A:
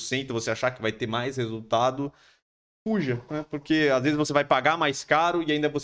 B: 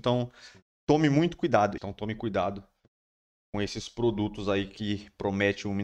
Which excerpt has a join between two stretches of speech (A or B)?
B